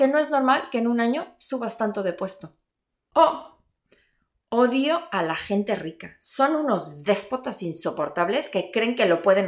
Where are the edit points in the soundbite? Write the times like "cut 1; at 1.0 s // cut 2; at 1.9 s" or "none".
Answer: none